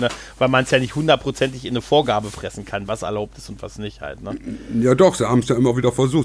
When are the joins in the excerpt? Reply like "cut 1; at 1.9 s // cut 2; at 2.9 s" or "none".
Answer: none